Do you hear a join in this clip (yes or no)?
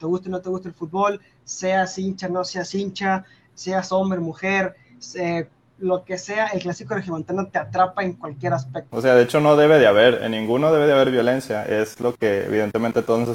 yes